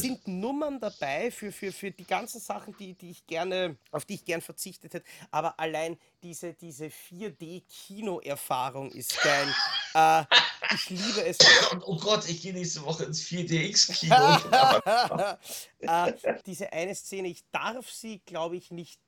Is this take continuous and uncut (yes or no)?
no